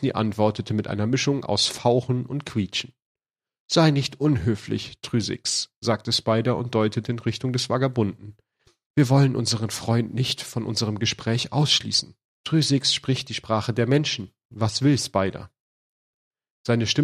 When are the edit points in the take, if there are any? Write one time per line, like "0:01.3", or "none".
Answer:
0:12.4